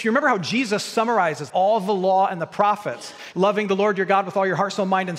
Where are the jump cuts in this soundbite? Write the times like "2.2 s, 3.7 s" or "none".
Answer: 1.5 s, 3.3 s